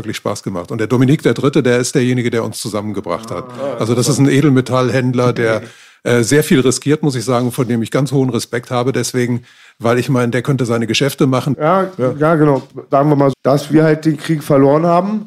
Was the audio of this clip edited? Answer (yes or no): yes